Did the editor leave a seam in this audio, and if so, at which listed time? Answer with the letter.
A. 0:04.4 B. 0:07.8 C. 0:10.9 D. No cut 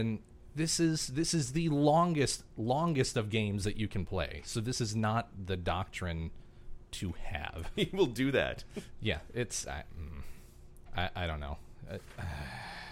B